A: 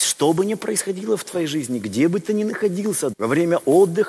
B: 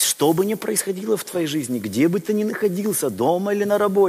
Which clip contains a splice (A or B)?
A